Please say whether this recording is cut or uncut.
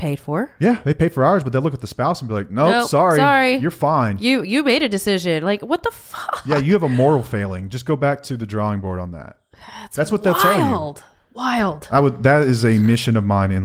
uncut